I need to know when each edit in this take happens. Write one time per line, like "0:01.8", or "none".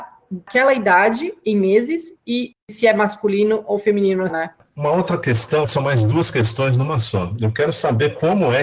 0:04.3
0:05.6